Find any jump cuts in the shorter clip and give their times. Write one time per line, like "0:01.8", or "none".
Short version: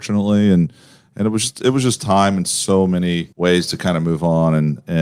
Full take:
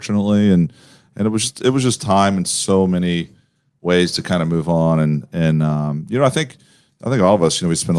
0:03.3